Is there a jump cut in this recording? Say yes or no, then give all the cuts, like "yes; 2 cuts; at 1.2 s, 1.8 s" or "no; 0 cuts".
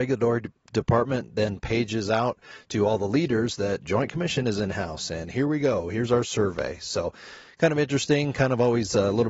no; 0 cuts